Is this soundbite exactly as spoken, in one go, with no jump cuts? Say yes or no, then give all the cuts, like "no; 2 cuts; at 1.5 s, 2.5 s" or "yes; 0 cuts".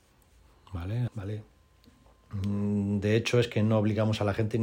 no; 1 cut; at 1.1 s